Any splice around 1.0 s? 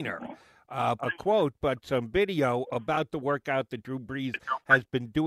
yes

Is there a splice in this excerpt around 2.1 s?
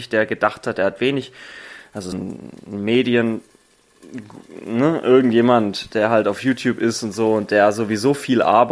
yes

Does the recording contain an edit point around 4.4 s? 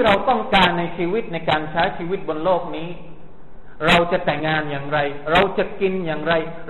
yes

